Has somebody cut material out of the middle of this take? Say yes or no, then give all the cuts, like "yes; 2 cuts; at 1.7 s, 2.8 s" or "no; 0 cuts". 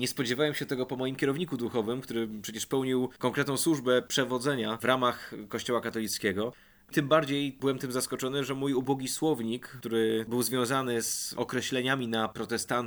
no; 0 cuts